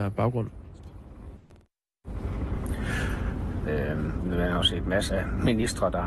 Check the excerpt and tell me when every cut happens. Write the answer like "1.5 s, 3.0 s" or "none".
3.7 s, 5.1 s